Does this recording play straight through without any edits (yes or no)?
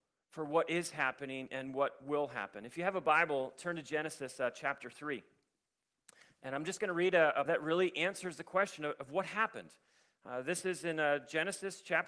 no